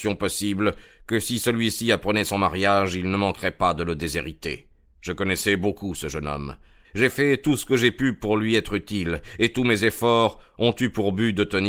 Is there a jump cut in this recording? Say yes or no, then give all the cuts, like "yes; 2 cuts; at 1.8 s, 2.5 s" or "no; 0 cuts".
yes; 1 cut; at 6.8 s